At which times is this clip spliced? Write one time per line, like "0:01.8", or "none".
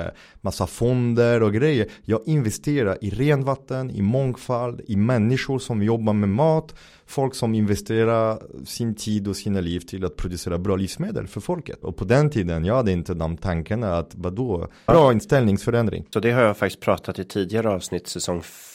0:11.8
0:14.9
0:16.1